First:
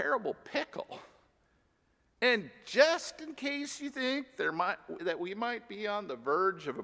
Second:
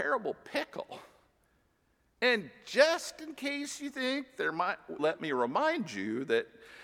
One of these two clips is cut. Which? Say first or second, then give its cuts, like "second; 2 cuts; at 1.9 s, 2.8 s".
second; 1 cut; at 5.0 s